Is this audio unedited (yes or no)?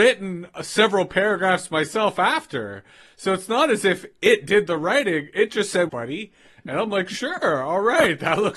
no